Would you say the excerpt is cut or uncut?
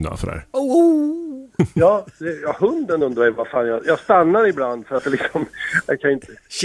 uncut